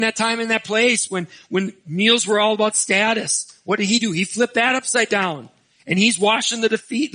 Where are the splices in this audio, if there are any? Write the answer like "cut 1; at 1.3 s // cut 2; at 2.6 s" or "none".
none

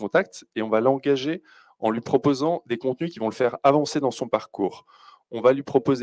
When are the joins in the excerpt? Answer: none

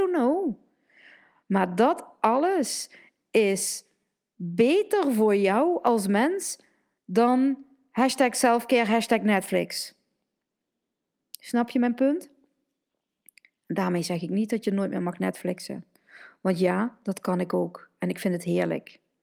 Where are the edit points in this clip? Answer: none

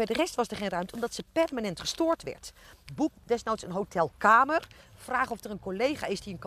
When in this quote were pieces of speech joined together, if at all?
cut 1; at 2.9 s

